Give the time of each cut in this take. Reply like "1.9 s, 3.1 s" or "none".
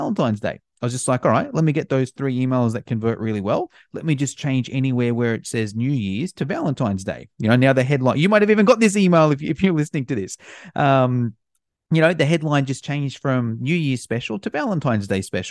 none